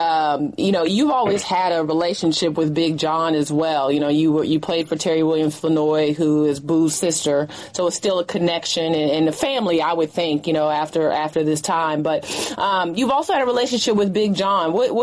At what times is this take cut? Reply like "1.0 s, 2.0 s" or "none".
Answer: none